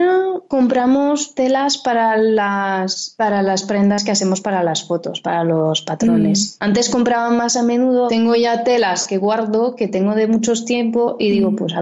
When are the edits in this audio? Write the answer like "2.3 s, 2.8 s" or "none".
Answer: 8.1 s